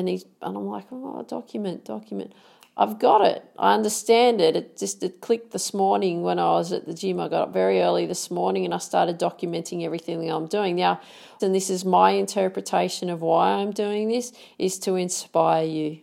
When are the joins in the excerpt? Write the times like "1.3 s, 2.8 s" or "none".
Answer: 11.4 s